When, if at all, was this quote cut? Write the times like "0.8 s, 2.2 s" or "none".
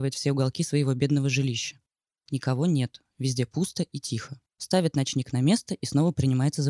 4.5 s